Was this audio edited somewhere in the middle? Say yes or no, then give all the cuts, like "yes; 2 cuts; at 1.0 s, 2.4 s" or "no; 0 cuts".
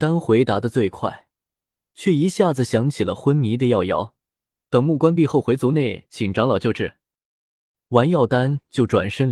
yes; 1 cut; at 4.7 s